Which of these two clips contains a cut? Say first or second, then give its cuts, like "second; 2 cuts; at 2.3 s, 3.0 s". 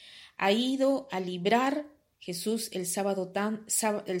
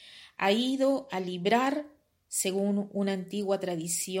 first; 1 cut; at 2.1 s